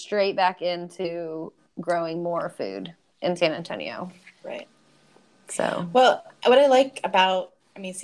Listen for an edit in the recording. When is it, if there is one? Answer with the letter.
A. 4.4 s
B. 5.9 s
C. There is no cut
A